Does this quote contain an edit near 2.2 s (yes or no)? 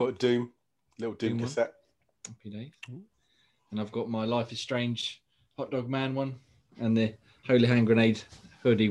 no